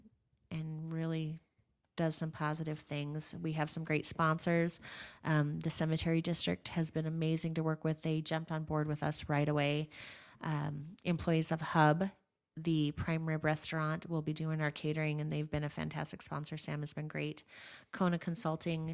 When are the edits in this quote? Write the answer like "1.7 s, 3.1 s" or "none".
none